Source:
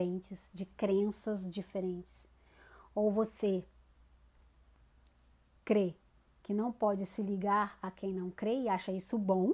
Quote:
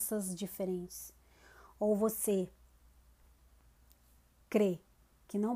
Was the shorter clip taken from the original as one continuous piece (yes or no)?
yes